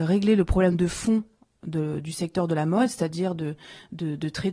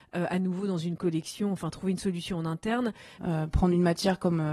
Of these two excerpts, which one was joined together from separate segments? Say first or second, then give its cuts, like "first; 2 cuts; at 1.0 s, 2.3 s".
second; 1 cut; at 3.2 s